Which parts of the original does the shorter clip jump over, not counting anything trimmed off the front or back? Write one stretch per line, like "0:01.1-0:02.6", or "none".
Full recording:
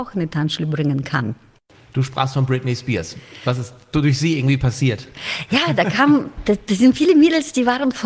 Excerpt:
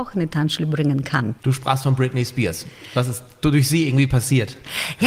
0:01.4-0:01.9

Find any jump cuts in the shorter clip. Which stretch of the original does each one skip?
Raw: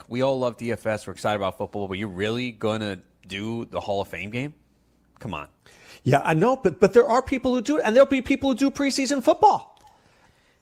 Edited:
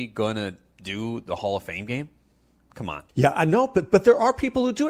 0:05.5-0:06.0

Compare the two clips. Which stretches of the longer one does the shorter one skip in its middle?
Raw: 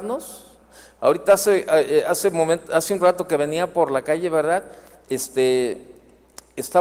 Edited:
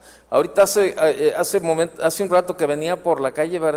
none

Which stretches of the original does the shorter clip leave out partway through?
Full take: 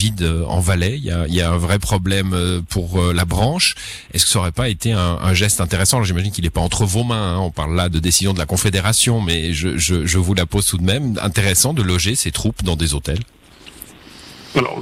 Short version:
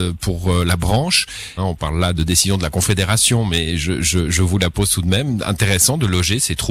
0:04.1-0:07.3

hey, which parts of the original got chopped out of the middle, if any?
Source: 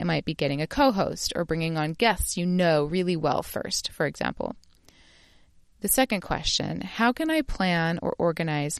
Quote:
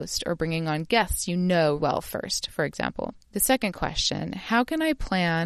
0:02.9-0:03.2
0:04.6-0:05.7

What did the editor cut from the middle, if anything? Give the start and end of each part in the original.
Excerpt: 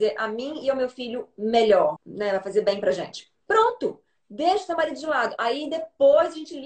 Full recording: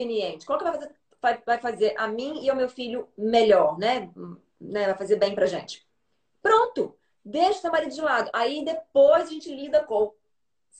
0:03.8-0:04.5
0:06.0-0:06.4

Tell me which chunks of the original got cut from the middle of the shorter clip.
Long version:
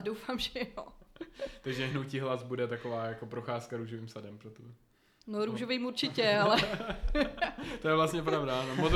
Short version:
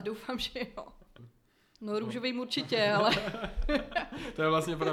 0:01.2-0:04.6

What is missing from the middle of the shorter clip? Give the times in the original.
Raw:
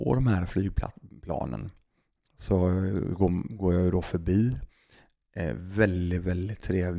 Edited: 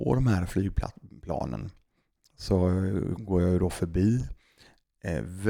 0:03.2-0:03.5

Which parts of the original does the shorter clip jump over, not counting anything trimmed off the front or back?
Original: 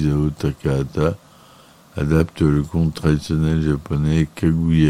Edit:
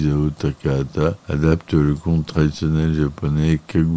0:01.2-0:01.9

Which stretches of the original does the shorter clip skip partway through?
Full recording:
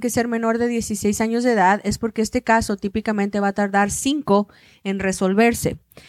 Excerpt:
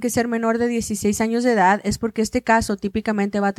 none

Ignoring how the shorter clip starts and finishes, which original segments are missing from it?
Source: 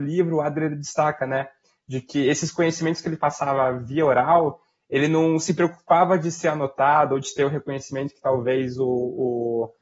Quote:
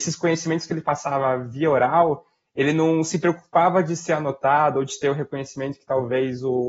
none

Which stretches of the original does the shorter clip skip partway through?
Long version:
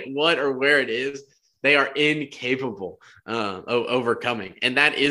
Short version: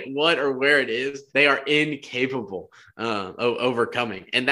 0:01.3-0:01.6

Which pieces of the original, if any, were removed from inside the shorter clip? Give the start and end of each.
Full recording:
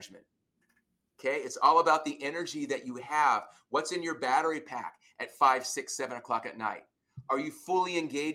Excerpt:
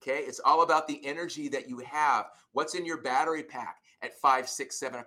none

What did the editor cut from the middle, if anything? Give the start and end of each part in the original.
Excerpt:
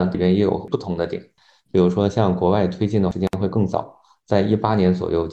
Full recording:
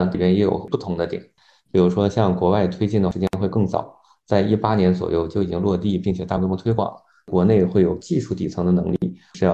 none

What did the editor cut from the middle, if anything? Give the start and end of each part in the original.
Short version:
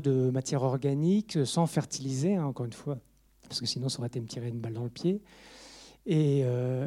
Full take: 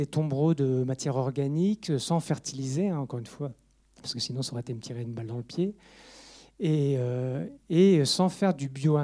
none

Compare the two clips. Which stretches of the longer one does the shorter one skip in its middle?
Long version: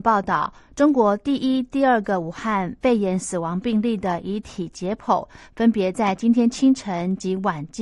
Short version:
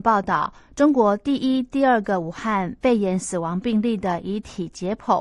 none

